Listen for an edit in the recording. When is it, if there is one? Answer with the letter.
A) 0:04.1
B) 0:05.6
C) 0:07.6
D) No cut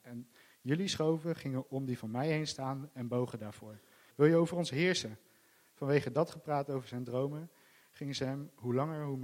A